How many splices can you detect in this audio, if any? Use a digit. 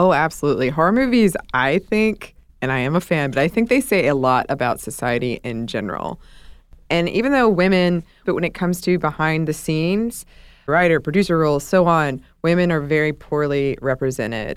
2